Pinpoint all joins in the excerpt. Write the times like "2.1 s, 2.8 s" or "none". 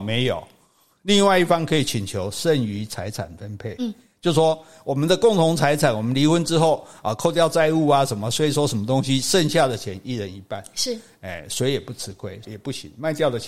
12.4 s